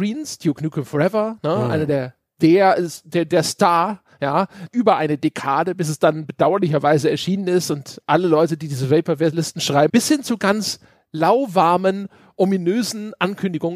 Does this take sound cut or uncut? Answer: cut